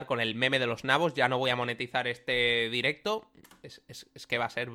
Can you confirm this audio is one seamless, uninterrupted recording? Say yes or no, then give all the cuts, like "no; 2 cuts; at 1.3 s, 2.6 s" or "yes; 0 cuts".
yes; 0 cuts